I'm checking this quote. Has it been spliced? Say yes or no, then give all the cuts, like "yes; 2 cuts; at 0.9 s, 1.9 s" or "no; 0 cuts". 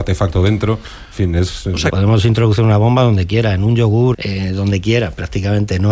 yes; 2 cuts; at 1.9 s, 4.1 s